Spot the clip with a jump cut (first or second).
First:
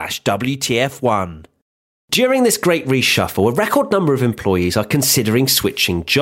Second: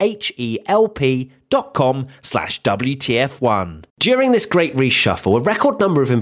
second